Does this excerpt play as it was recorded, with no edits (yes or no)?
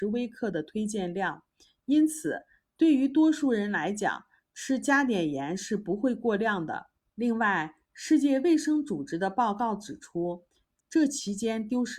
no